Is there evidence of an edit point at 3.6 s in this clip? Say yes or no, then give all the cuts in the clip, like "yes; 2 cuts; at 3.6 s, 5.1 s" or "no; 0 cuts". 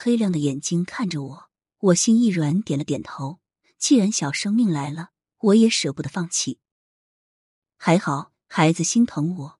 no; 0 cuts